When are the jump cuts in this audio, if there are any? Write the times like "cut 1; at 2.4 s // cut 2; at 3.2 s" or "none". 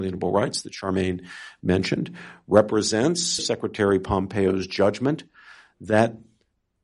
cut 1; at 3.4 s